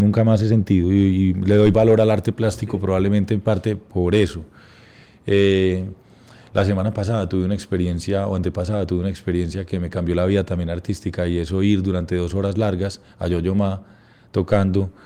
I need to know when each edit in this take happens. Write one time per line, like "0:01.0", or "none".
none